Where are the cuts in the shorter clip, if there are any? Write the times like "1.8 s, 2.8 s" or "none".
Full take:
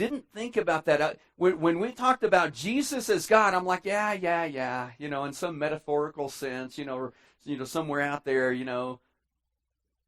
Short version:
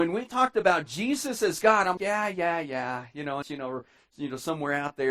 2.0 s, 3.4 s

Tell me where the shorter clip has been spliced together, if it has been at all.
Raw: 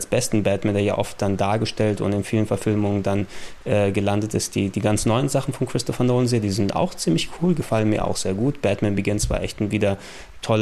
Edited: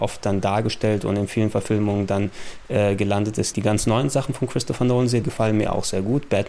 3.5 s, 5.2 s

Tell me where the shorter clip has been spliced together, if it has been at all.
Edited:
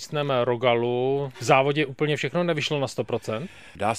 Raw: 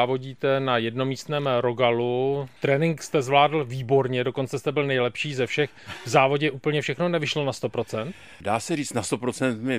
1.3 s

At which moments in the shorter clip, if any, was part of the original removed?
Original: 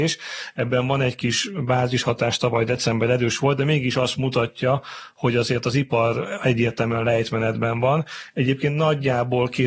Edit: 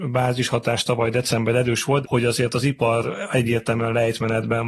2.0 s

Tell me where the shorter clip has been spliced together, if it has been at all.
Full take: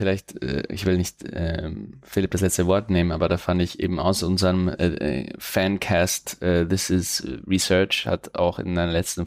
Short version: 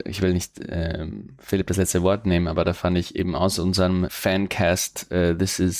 4.1 s

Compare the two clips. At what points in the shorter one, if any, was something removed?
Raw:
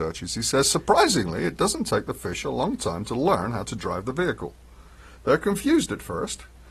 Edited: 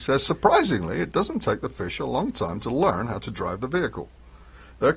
none

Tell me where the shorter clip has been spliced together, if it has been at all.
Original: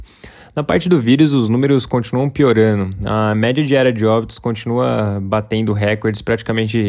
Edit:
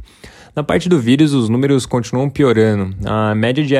none

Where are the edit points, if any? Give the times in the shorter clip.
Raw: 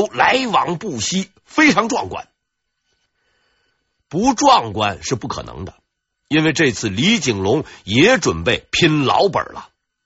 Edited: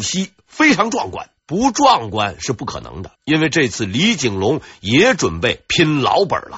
1.4 s, 3.2 s

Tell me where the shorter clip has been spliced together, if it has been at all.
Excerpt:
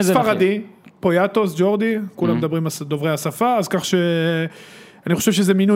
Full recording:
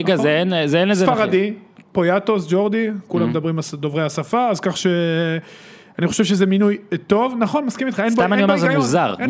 none

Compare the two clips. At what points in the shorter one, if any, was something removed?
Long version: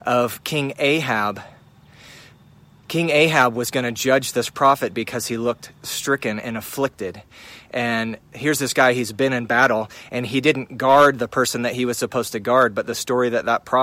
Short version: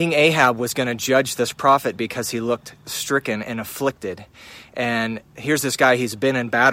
none

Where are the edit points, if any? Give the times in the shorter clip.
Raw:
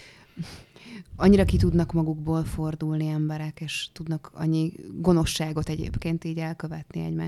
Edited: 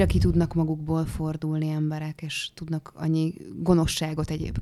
none

